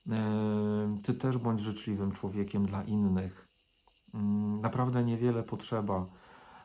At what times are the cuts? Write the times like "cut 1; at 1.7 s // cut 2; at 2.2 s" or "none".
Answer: none